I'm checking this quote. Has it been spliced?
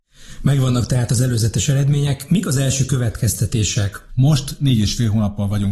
yes; 1 cut; at 4.1 s

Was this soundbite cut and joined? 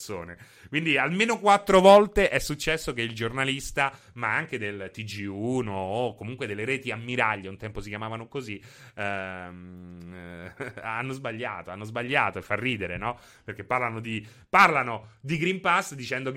no; 0 cuts

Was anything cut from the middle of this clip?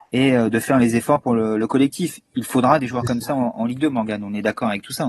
no; 0 cuts

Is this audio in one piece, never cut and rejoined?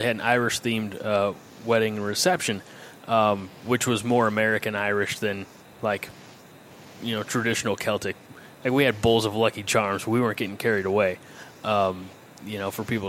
yes; 0 cuts

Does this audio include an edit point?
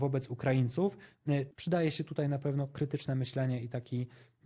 yes; 1 cut; at 1.5 s

